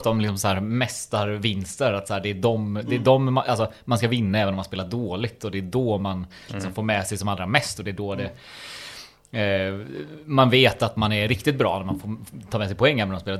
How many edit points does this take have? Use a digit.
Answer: 0